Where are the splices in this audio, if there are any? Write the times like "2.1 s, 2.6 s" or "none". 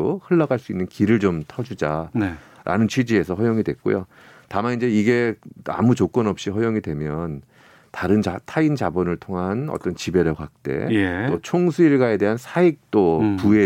none